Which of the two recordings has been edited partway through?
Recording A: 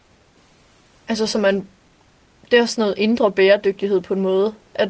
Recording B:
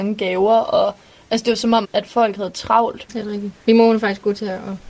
B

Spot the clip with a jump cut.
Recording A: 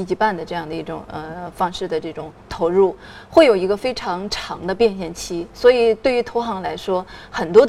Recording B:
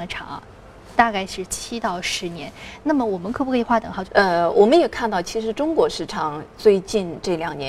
B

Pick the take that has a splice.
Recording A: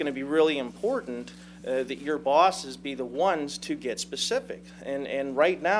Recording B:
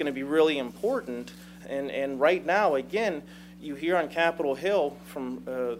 B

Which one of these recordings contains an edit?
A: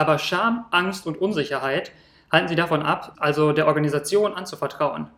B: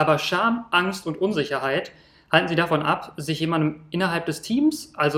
A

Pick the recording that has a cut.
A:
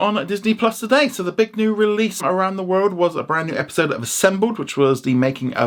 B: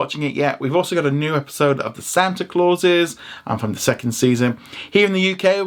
A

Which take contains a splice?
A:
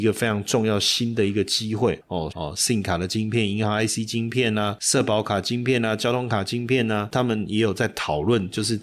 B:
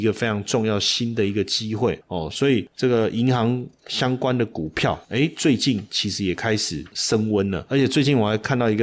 A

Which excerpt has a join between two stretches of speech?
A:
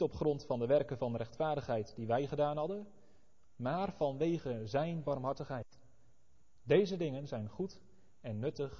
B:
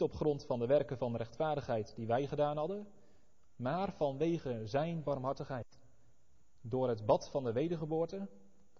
A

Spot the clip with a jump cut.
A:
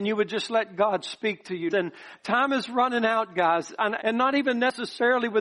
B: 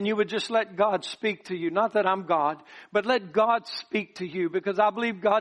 A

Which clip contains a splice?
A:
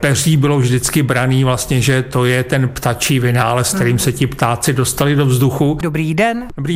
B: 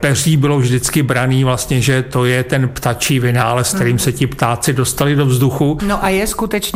A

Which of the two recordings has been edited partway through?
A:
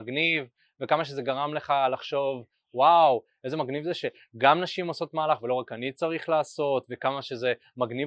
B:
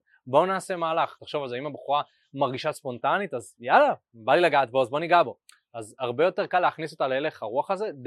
B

